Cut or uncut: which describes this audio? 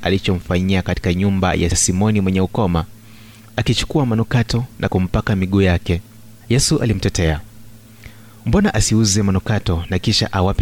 cut